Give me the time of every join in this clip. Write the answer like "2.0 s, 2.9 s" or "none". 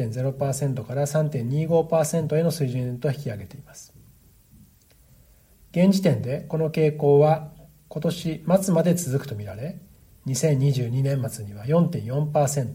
none